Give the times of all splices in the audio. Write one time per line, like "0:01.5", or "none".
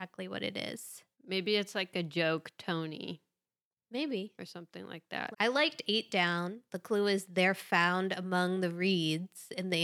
0:01.1
0:05.3